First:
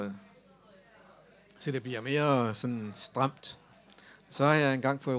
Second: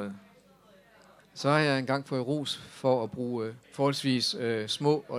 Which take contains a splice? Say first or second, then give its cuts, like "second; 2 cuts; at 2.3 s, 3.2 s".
second; 2 cuts; at 1.2 s, 3.6 s